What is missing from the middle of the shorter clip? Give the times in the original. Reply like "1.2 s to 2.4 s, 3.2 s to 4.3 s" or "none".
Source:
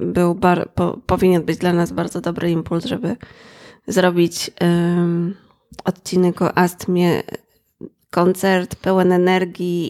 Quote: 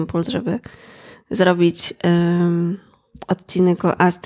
none